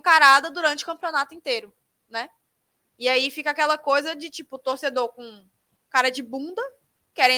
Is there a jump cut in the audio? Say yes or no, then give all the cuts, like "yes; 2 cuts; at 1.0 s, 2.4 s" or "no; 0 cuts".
no; 0 cuts